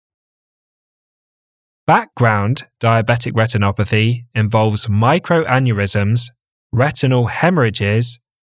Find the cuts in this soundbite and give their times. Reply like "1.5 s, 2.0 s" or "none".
none